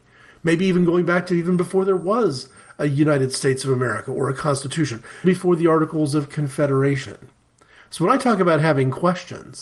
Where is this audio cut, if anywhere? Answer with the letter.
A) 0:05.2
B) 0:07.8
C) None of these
A